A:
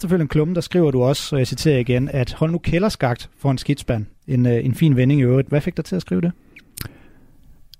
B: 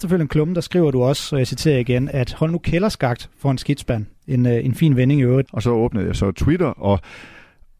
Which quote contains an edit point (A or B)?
B